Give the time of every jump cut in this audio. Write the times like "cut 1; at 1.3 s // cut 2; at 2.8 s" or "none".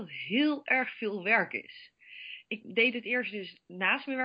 cut 1; at 2.6 s